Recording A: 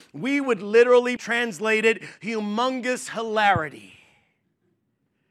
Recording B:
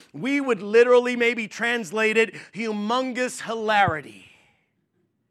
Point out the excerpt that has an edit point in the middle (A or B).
A